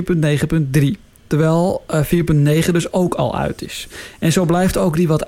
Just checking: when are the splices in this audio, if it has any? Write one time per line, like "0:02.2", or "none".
0:01.2